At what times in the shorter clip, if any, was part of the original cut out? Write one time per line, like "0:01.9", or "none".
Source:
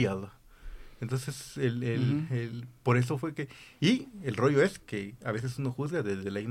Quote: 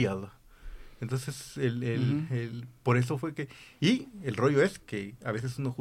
none